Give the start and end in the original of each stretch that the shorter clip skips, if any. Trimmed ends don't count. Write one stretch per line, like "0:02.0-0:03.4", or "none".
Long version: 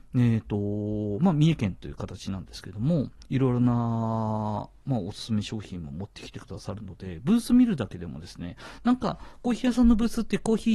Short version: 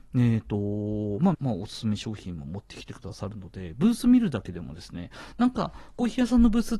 0:01.3-0:04.8